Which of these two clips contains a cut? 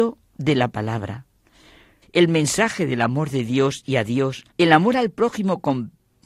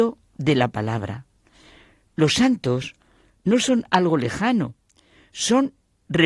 first; 2 cuts; at 2.0 s, 4.5 s

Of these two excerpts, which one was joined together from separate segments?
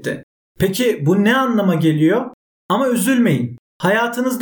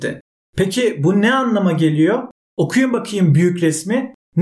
first; 1 cut; at 2.5 s

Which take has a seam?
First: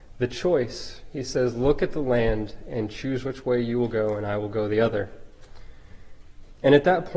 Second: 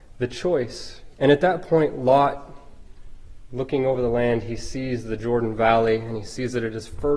second; 1 cut; at 1.1 s

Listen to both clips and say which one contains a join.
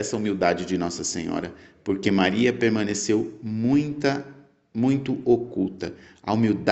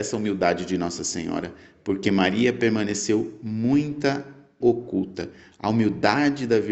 second; 1 cut; at 4.6 s

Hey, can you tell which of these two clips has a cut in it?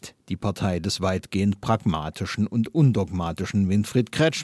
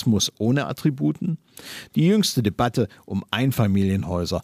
second; 1 cut; at 1.9 s

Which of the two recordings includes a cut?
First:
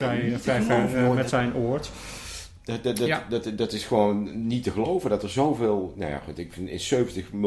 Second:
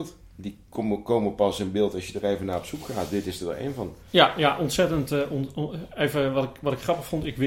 first; 1 cut; at 2.6 s

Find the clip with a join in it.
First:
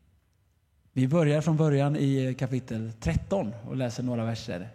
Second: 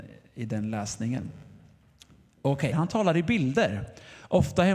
second; 1 cut; at 2.7 s

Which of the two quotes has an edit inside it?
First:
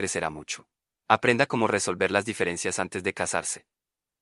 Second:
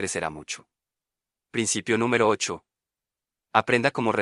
first; 1 cut; at 0.9 s

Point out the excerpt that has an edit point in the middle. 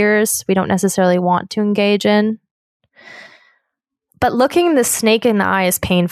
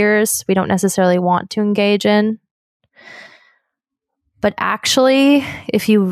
first; 1 cut; at 4.1 s

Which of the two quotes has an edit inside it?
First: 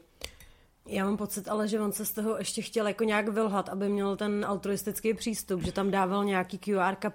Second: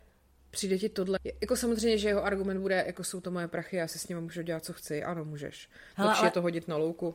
second; 2 cuts; at 1.2 s, 5.9 s

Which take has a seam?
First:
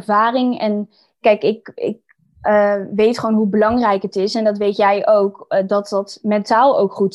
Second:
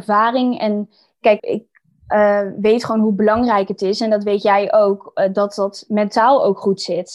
second; 1 cut; at 1.4 s

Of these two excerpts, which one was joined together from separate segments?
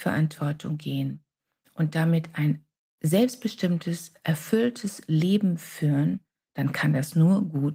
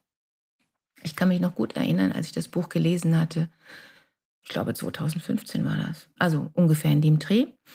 second; 1 cut; at 6.2 s

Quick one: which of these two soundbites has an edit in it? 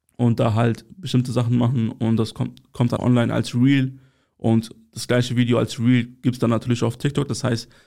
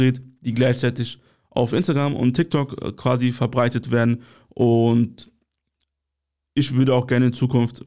first; 1 cut; at 3.0 s

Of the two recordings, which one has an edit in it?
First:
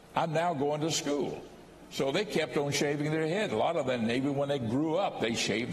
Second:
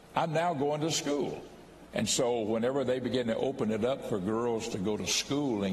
second; 1 cut; at 1.9 s

